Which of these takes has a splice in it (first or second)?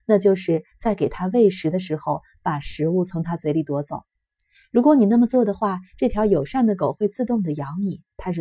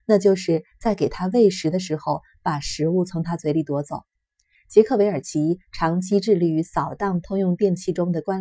second